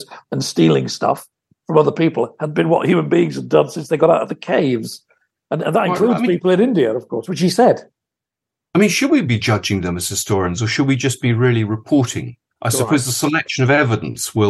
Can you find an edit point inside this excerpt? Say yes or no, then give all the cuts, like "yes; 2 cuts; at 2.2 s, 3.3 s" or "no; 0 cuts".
yes; 1 cut; at 12.6 s